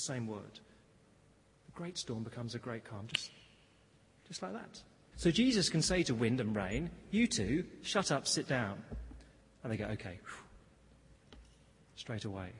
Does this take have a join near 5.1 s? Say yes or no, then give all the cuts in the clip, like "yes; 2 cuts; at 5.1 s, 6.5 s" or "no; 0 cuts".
yes; 1 cut; at 5.1 s